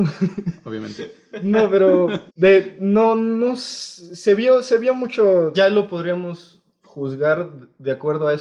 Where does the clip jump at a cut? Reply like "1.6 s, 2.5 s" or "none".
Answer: 2.3 s, 5.5 s